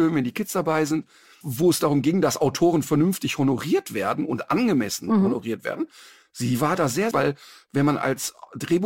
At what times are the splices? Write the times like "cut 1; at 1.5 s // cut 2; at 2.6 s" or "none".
cut 1; at 1.4 s // cut 2; at 7.1 s

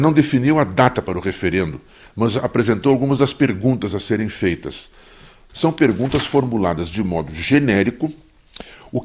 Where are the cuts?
cut 1; at 5.5 s

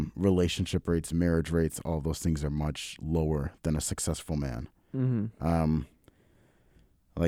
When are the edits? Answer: none

